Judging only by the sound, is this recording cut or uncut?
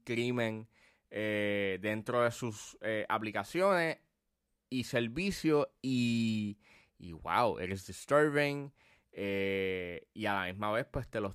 uncut